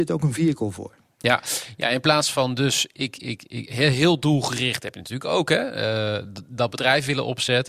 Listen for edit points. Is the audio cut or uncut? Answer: uncut